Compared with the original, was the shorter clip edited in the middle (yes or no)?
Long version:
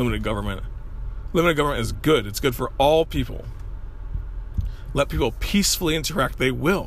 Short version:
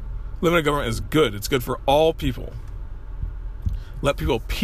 no